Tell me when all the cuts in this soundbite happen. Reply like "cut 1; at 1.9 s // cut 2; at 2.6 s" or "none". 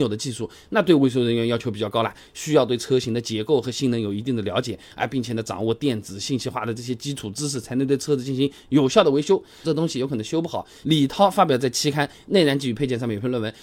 cut 1; at 9.6 s // cut 2; at 10.8 s